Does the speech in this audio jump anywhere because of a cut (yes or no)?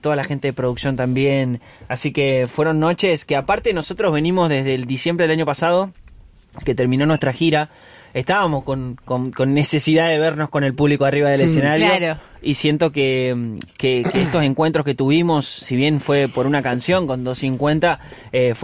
no